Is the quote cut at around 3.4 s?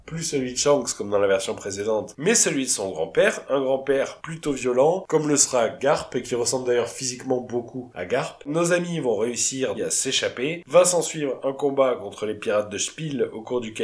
no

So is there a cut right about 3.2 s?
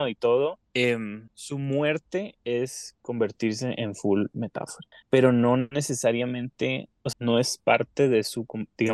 no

